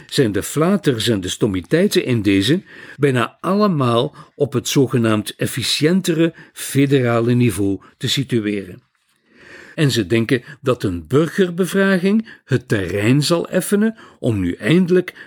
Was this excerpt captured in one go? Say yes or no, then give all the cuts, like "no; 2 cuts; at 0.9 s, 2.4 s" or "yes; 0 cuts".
no; 2 cuts; at 2.9 s, 9.7 s